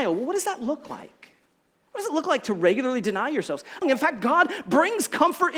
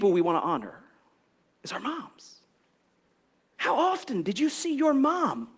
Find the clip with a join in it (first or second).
first